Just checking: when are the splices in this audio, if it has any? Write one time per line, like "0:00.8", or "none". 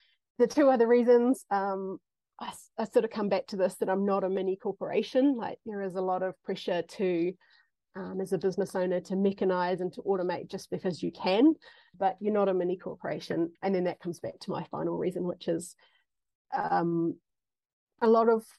0:13.5